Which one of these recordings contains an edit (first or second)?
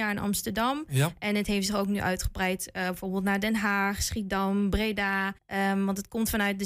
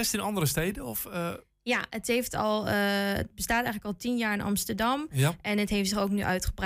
first